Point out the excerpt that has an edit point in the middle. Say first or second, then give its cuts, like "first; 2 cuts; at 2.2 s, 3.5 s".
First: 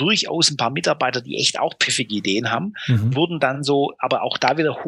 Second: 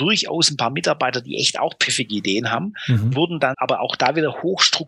second; 1 cut; at 3.5 s